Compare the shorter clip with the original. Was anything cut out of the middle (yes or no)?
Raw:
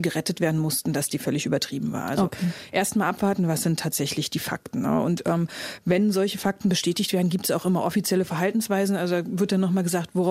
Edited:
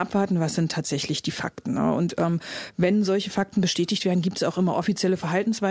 no